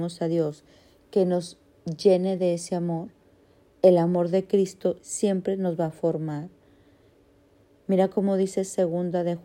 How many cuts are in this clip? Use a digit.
1